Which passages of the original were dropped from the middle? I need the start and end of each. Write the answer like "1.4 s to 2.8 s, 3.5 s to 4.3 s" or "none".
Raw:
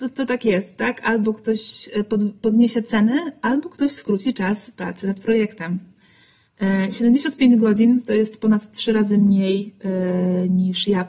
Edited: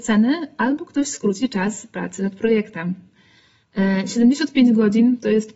none